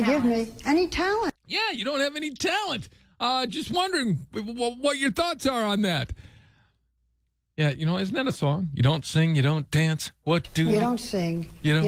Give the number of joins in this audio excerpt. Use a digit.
0